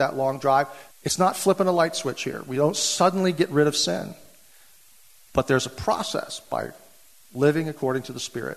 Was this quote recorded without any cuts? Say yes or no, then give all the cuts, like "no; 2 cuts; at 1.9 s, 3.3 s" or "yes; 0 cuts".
no; 1 cut; at 0.9 s